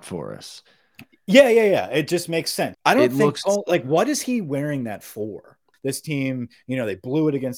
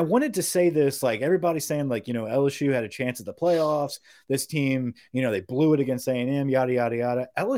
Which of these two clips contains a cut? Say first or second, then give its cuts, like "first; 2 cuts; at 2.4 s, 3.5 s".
first; 2 cuts; at 2.7 s, 5.7 s